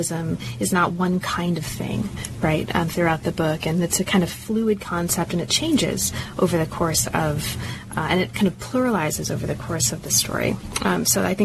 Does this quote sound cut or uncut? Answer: uncut